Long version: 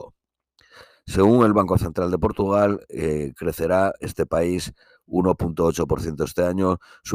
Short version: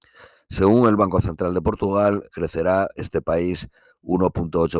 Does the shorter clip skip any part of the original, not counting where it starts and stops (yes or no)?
yes